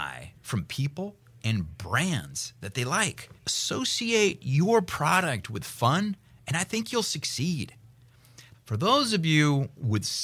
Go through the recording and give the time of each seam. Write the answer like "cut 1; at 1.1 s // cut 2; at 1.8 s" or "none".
cut 1; at 3.4 s // cut 2; at 8.5 s